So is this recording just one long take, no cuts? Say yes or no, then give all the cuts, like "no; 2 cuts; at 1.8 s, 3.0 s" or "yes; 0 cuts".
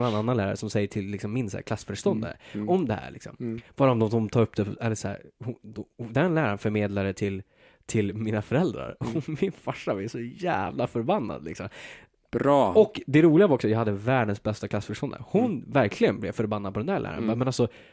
yes; 0 cuts